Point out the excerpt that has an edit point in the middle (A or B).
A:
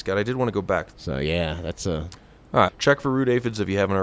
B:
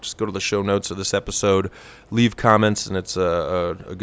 A